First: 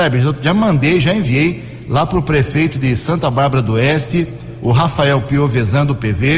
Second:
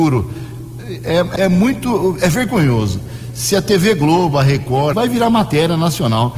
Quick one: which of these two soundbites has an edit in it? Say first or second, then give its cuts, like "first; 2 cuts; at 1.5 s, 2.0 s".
second; 2 cuts; at 1.4 s, 4.9 s